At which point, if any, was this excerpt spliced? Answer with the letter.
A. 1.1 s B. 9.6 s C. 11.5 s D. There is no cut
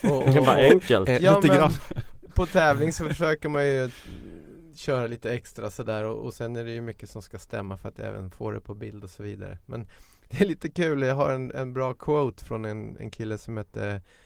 D